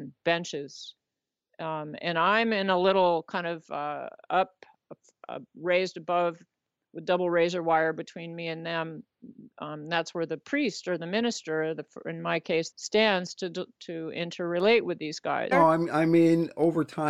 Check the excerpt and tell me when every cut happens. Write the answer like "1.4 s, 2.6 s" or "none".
12.7 s, 15.5 s